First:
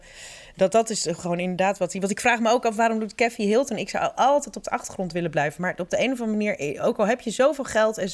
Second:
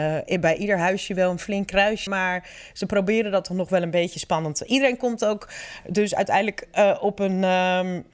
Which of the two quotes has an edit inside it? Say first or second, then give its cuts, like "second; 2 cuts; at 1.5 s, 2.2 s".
second; 1 cut; at 2.1 s